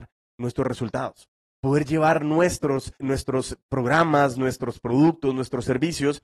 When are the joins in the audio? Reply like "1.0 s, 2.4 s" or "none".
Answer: 3.0 s